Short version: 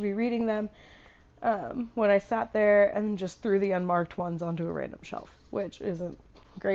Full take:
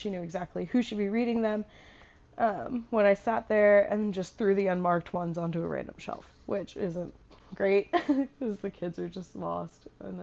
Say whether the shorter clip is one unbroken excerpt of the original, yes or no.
yes